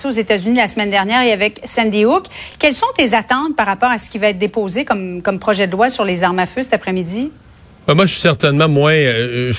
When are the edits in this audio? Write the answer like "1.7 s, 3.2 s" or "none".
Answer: none